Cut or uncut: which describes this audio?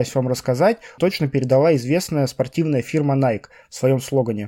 cut